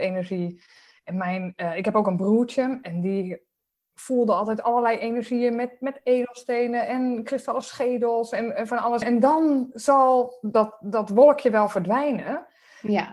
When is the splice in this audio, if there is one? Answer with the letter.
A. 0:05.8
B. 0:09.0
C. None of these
B